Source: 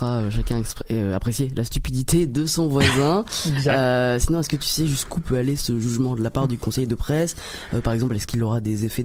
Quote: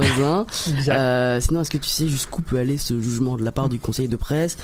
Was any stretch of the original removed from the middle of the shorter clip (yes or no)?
no